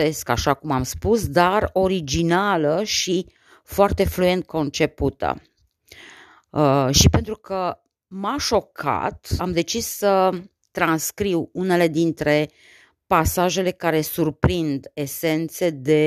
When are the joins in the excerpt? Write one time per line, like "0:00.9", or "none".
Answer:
0:09.4